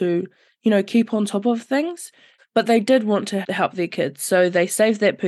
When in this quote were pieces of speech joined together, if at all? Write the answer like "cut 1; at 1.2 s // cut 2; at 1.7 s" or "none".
cut 1; at 2.4 s // cut 2; at 3.4 s